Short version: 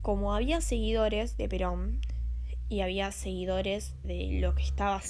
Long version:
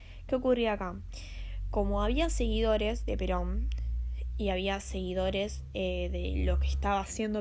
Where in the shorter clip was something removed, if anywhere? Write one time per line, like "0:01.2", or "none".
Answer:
0:04.0

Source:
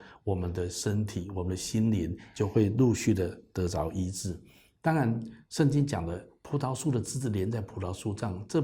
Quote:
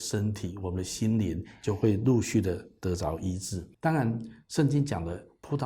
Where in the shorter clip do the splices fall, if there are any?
0:03.7

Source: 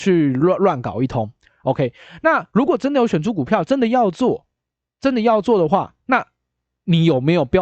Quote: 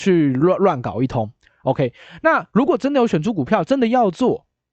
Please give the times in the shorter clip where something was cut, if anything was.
none

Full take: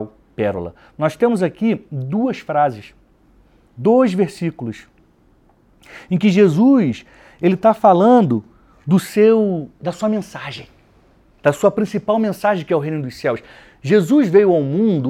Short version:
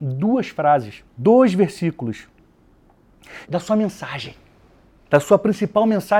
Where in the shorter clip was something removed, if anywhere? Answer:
0:01.1
0:03.4

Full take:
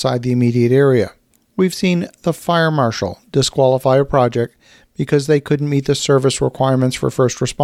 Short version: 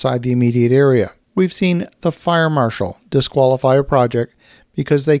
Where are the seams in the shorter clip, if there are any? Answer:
0:01.2

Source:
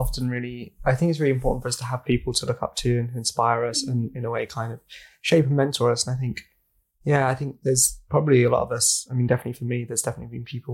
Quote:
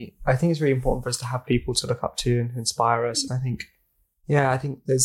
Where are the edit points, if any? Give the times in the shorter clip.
0:03.3

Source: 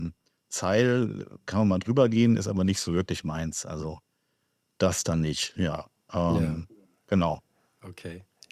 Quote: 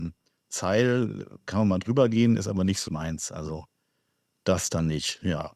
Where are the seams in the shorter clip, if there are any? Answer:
0:02.9

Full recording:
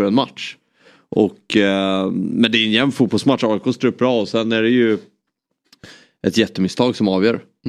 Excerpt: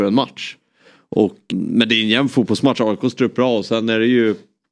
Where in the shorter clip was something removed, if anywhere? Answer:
0:01.5

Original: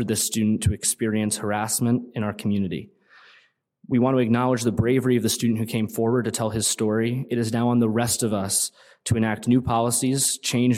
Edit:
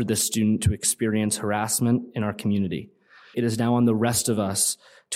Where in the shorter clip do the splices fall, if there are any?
0:03.3

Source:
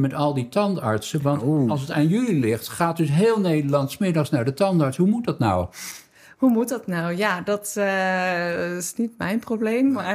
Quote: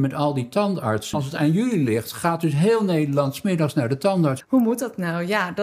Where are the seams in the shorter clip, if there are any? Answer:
0:01.1
0:04.4

